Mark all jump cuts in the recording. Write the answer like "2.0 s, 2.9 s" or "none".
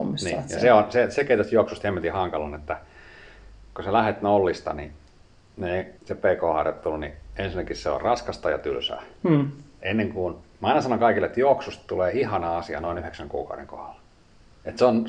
6.0 s